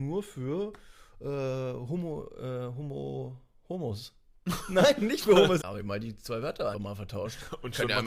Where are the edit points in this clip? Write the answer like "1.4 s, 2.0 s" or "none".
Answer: 5.6 s, 6.7 s

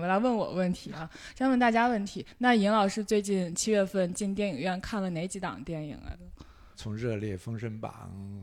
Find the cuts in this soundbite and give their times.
6.7 s

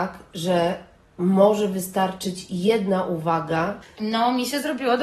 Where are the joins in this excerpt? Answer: 3.8 s

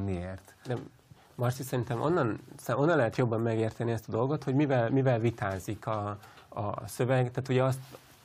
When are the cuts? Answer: none

